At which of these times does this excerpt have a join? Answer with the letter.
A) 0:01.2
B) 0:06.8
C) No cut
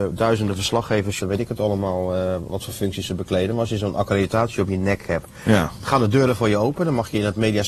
A